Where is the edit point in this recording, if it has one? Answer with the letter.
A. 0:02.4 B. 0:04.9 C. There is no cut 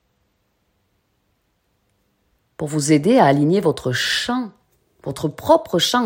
A